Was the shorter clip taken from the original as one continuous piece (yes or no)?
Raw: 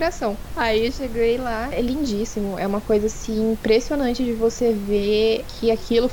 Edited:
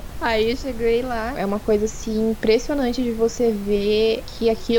no